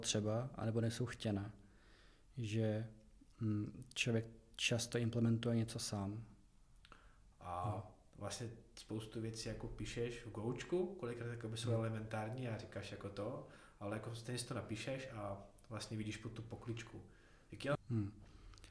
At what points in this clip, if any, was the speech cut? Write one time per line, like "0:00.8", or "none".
0:07.3
0:17.8

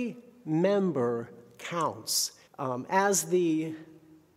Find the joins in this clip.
0:02.5

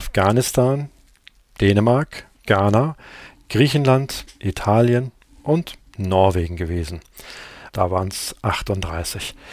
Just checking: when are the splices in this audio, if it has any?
0:02.4
0:07.7

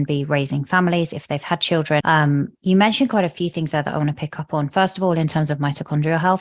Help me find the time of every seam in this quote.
0:02.0

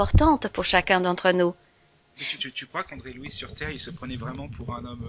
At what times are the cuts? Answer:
0:02.4

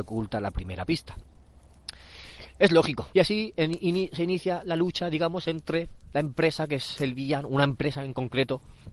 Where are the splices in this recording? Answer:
0:03.1

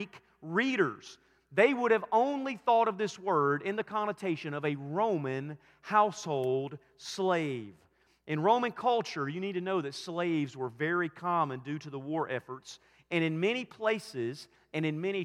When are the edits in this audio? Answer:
none

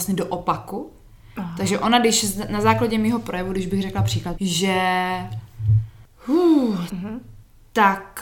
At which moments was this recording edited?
0:04.3
0:06.9

